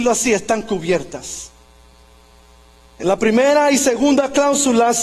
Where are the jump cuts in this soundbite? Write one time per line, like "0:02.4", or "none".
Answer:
none